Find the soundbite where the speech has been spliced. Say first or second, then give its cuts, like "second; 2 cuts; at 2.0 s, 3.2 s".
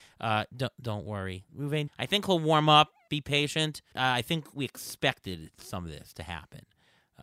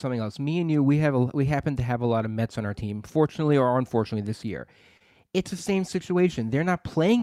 first; 2 cuts; at 1.9 s, 3.9 s